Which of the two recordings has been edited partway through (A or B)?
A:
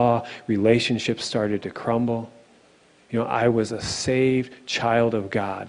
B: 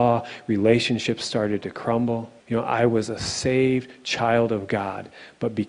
B